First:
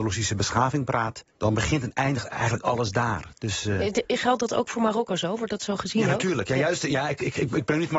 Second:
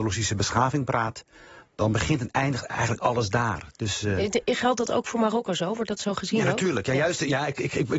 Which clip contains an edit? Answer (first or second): first